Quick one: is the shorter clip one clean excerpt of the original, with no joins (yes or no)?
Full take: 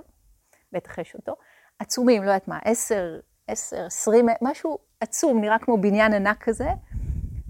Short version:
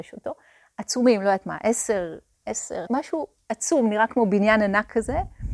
no